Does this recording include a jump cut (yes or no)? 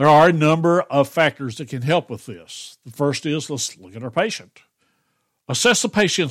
no